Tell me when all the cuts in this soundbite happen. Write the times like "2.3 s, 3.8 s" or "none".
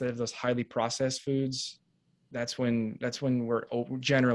none